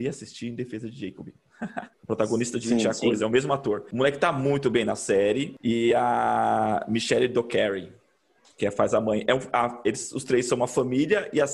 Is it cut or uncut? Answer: cut